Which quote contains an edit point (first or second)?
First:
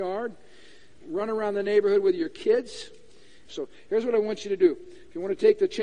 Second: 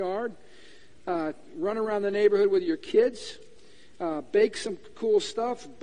first